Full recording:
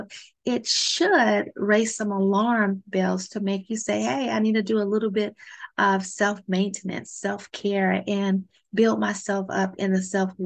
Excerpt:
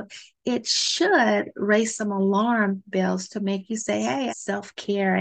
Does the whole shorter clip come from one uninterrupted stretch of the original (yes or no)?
no